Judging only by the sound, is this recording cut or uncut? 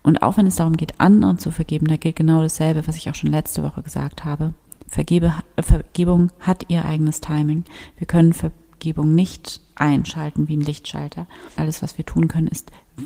cut